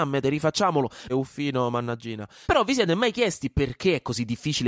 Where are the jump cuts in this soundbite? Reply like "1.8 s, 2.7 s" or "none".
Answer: 1.1 s, 2.4 s